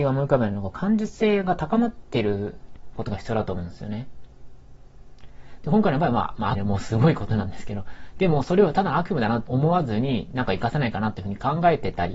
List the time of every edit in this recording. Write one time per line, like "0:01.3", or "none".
0:06.5
0:09.5